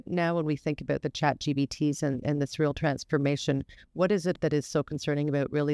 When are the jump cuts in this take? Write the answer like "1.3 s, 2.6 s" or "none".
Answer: none